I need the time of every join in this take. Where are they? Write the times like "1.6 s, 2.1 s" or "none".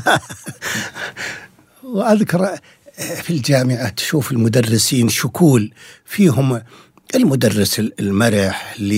3.2 s